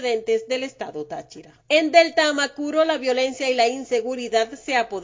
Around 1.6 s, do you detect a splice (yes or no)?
yes